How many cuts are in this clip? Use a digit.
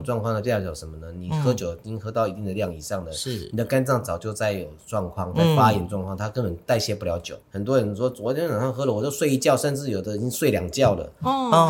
1